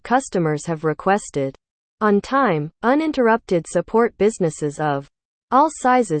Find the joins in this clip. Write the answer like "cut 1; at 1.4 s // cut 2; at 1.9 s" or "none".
none